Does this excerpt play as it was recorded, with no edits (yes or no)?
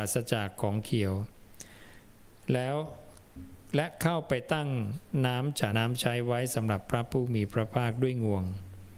no